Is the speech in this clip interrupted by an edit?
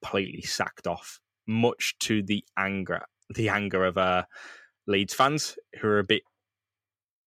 no; 0 cuts

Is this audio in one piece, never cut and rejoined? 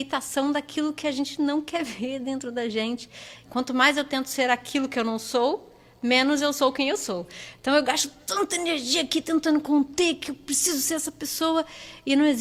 no; 1 cut; at 3.4 s

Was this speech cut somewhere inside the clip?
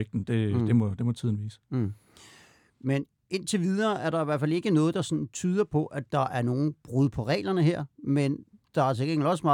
no; 0 cuts

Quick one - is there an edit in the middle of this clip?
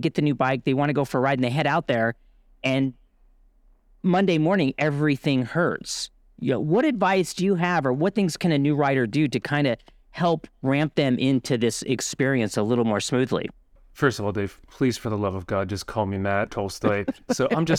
yes; 2 cuts; at 13.8 s, 16.5 s

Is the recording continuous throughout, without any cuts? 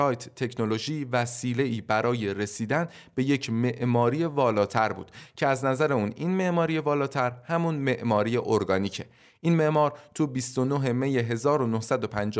yes; 0 cuts

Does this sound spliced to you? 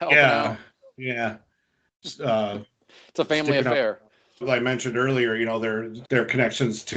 yes; 2 cuts; at 4.4 s, 6.0 s

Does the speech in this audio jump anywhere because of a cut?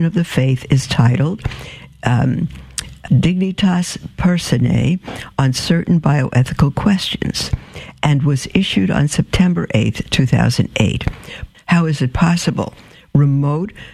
yes; 2 cuts; at 3.1 s, 11.5 s

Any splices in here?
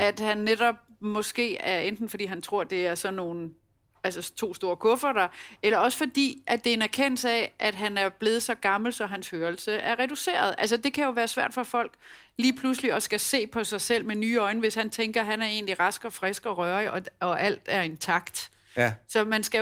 no; 0 cuts

